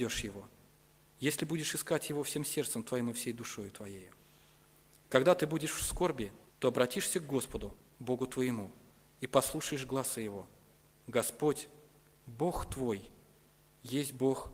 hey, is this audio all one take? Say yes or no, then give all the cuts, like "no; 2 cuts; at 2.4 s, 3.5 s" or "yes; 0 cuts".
no; 1 cut; at 6.5 s